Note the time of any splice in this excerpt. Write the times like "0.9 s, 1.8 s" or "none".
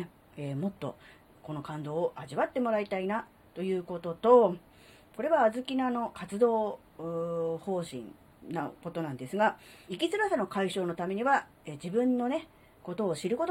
6.1 s, 9.9 s